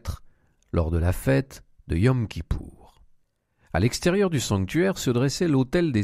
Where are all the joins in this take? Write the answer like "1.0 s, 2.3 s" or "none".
none